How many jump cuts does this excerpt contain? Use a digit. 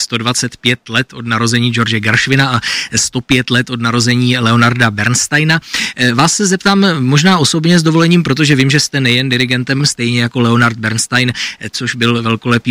2